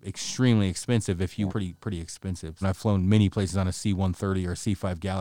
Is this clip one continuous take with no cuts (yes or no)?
no